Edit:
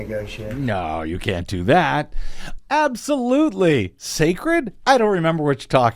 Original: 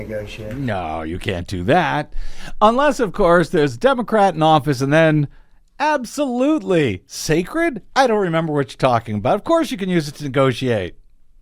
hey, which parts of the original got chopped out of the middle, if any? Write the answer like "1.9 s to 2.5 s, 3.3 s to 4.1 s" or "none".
2.6 s to 5.7 s